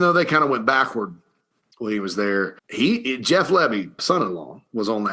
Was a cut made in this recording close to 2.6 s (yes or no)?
yes